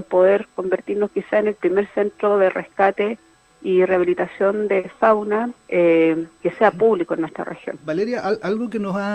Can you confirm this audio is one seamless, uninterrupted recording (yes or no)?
no